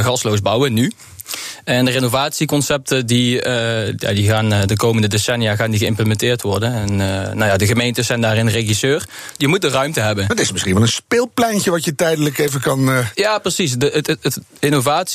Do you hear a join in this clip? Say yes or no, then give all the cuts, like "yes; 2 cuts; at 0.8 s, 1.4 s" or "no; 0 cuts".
yes; 1 cut; at 9.3 s